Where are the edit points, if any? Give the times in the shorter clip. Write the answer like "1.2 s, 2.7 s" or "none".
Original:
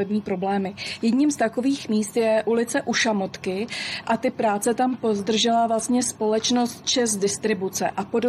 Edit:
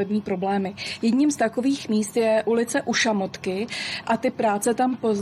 none

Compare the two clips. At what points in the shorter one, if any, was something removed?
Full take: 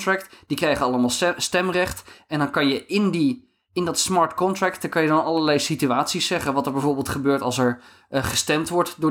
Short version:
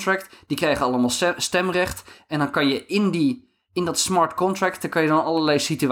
none

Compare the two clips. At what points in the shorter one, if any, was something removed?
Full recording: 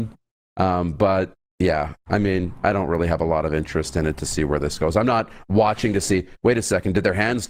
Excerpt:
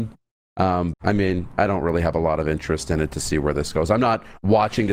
0.9 s

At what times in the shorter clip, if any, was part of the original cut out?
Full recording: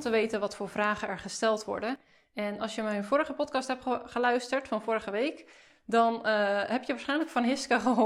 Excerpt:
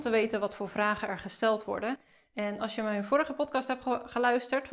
none

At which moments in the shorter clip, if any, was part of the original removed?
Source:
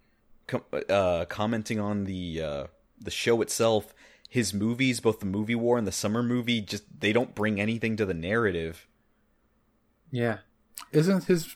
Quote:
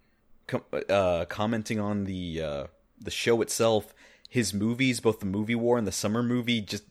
none

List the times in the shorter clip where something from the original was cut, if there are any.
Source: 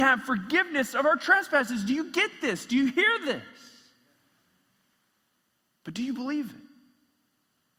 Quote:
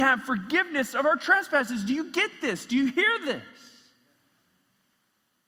none

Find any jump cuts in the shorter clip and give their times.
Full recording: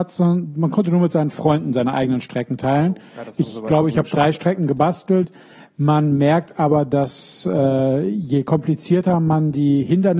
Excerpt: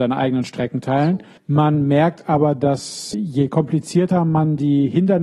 1.4 s, 3.1 s

